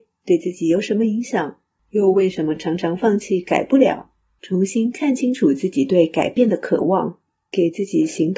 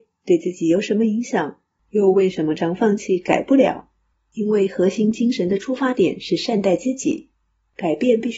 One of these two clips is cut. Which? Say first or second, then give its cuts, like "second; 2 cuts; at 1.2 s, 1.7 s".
second; 2 cuts; at 2.6 s, 4.1 s